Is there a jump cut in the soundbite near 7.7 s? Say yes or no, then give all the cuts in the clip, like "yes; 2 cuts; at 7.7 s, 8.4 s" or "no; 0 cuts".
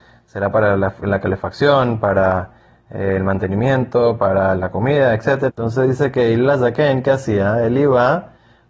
no; 1 cut; at 5.5 s